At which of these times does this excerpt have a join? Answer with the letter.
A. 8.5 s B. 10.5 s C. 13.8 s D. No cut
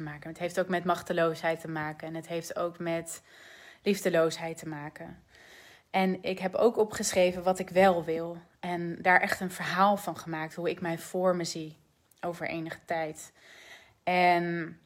D